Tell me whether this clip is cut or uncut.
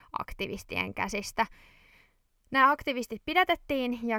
uncut